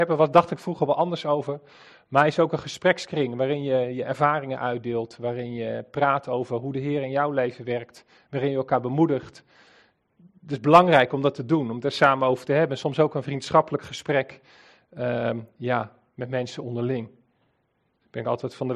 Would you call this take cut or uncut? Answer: uncut